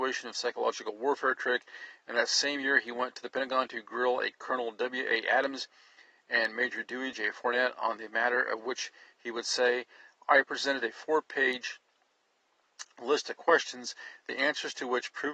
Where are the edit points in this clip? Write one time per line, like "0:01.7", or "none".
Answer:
0:07.1